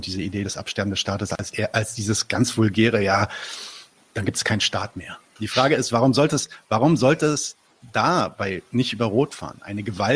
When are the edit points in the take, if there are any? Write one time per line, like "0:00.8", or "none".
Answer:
0:05.4